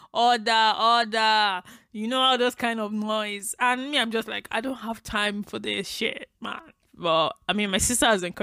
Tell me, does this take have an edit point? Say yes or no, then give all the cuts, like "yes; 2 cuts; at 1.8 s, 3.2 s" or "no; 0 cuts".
yes; 1 cut; at 6.8 s